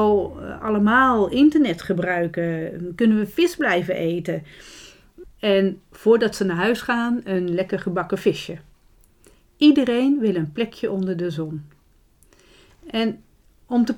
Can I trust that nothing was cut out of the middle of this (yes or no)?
no